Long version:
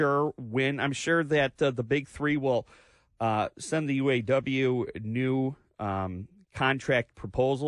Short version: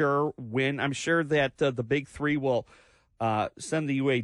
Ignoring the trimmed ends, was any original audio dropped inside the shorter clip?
no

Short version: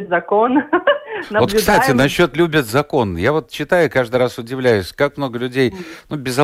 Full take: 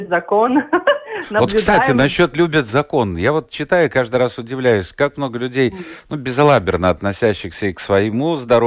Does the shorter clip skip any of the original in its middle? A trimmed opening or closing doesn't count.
no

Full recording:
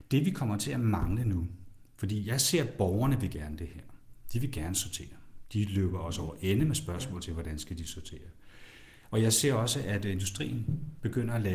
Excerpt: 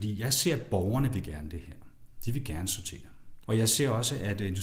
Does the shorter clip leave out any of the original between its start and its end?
yes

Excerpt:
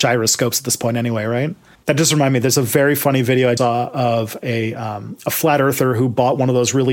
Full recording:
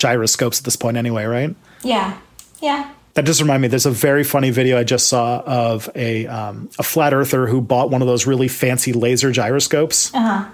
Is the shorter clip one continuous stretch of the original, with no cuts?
no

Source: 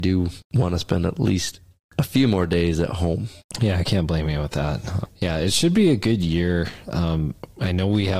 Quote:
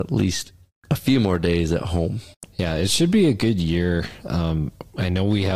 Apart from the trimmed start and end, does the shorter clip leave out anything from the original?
yes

